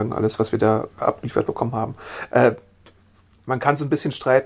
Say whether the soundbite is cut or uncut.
uncut